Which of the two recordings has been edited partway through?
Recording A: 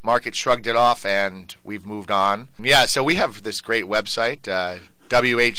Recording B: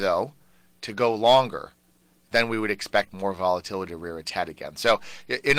A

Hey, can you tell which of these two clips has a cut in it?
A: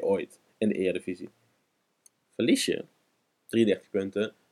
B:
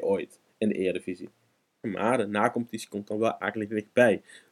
B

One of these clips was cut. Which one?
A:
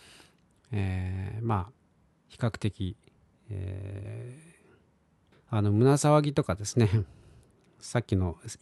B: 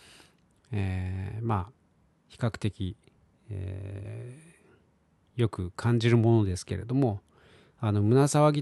A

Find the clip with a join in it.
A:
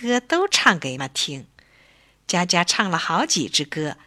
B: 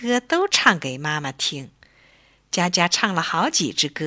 A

